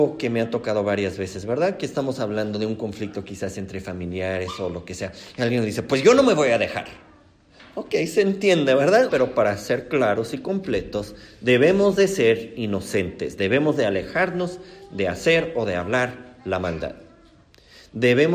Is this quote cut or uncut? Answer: cut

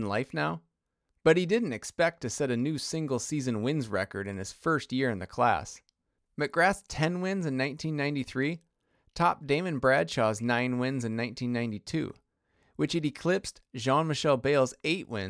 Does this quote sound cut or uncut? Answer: uncut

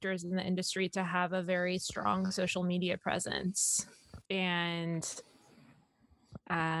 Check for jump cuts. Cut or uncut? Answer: cut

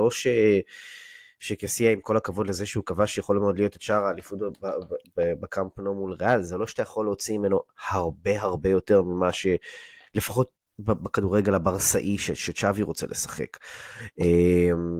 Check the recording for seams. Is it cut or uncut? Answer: cut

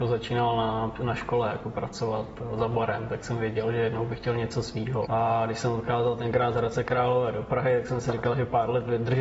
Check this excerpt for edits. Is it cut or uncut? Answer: cut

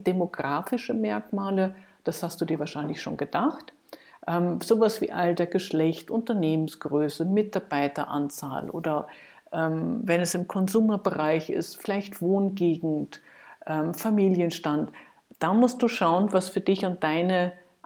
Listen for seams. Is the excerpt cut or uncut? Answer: uncut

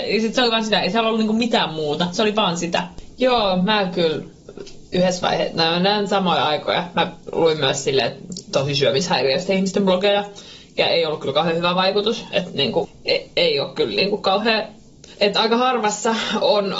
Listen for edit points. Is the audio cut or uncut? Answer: uncut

